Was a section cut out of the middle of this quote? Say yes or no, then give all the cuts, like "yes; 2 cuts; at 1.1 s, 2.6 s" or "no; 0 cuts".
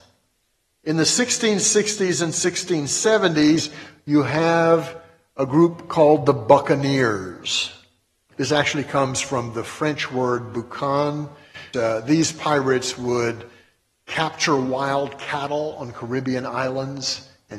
yes; 1 cut; at 11.7 s